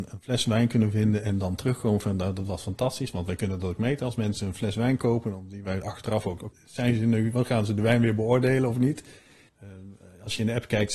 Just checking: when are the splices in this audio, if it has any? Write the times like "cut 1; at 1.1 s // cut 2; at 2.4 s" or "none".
cut 1; at 6.5 s // cut 2; at 9.5 s